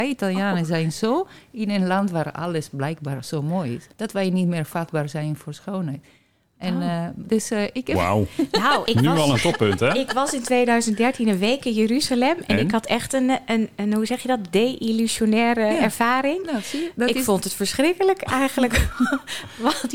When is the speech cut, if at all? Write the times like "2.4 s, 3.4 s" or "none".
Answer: 3.9 s, 8.9 s